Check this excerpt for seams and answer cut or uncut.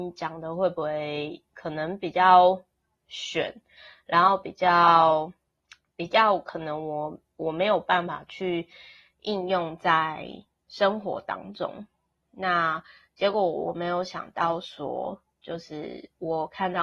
uncut